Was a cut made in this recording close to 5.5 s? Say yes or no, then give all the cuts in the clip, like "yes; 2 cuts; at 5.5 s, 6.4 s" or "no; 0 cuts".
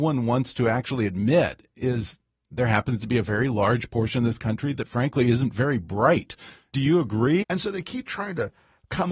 no; 1 cut; at 7.4 s